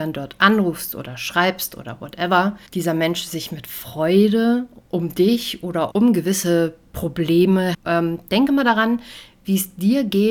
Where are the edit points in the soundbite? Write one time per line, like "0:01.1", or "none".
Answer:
0:02.7
0:05.9
0:07.7